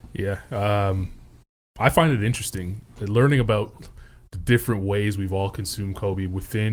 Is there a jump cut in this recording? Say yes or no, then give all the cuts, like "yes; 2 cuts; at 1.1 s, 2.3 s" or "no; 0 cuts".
no; 0 cuts